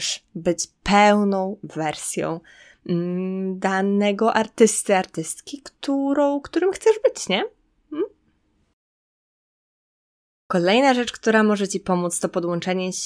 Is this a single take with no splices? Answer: yes; 0 cuts

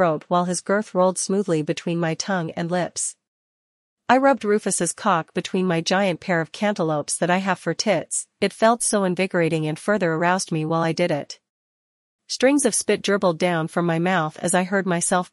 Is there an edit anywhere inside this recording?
no; 0 cuts

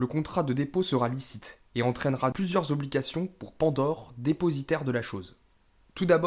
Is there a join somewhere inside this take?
yes; 1 cut; at 2.3 s

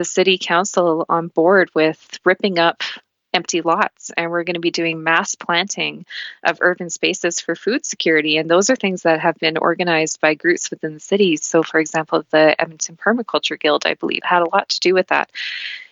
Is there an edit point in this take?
no; 0 cuts

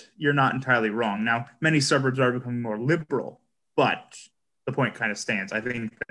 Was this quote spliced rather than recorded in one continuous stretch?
no; 0 cuts

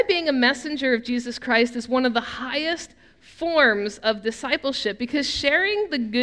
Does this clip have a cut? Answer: no; 0 cuts

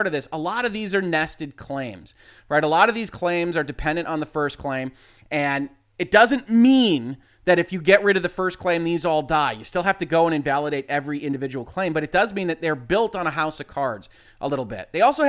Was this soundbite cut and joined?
no; 0 cuts

